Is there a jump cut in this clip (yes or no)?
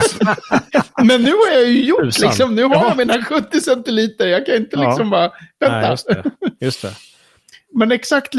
no